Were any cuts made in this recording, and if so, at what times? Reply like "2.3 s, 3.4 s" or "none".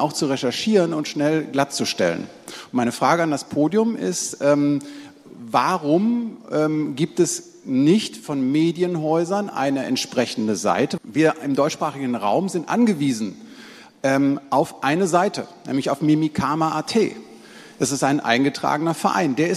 11.0 s